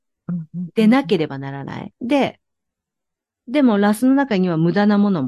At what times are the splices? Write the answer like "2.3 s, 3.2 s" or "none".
1.9 s